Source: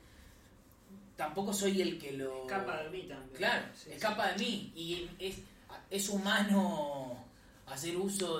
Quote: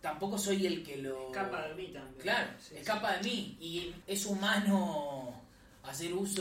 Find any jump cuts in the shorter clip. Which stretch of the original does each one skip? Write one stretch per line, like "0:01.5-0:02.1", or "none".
0:05.2-0:05.8